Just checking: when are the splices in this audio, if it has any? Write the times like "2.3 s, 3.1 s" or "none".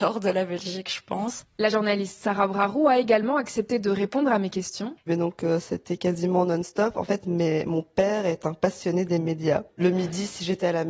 1.5 s, 5.1 s, 9.7 s